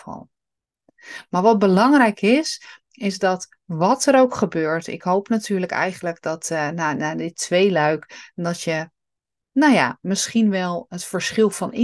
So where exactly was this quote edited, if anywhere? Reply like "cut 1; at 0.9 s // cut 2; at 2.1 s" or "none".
none

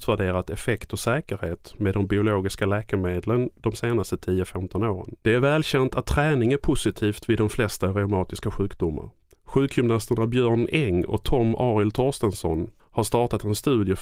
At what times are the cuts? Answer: cut 1; at 5.2 s // cut 2; at 9.3 s // cut 3; at 12.8 s

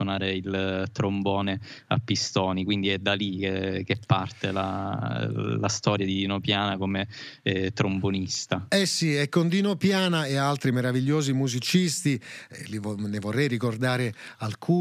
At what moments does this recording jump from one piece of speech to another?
none

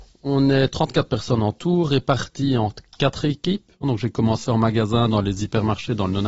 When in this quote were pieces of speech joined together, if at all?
cut 1; at 3.8 s

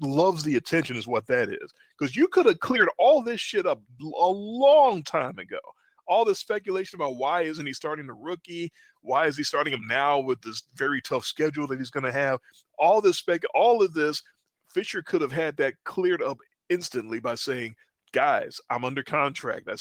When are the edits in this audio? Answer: none

